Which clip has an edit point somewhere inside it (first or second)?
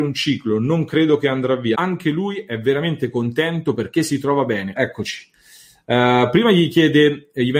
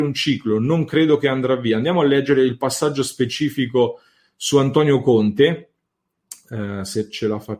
first